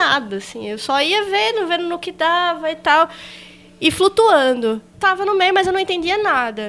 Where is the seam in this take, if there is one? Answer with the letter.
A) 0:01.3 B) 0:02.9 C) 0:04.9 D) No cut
C